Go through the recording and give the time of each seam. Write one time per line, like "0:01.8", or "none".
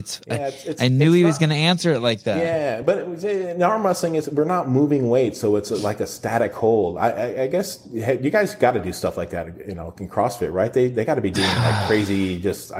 none